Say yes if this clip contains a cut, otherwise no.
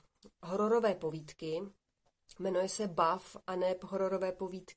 no